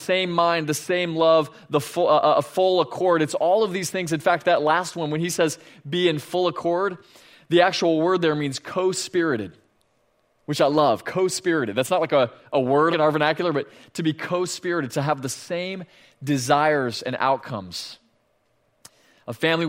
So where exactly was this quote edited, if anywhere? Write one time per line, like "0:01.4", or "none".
0:12.9